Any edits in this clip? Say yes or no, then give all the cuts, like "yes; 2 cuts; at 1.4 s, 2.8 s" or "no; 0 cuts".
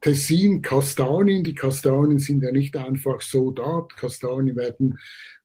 no; 0 cuts